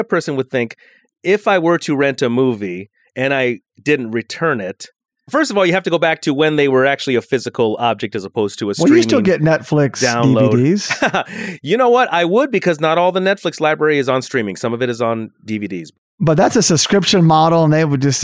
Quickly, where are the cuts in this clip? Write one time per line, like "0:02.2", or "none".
none